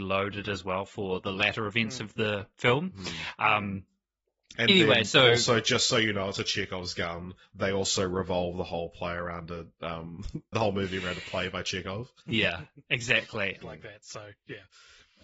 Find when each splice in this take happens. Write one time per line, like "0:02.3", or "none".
0:10.5
0:12.2
0:13.6